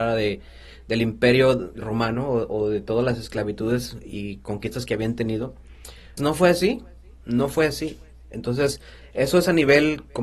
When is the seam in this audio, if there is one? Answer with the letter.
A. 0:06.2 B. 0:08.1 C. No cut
A